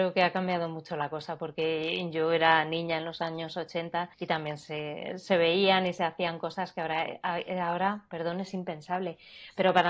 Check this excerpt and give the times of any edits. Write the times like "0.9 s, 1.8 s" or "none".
4.1 s